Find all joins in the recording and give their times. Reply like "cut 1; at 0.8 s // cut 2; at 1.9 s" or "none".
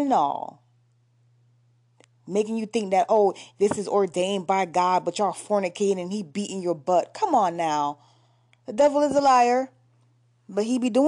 none